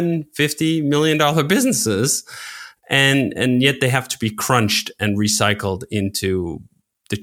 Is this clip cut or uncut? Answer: uncut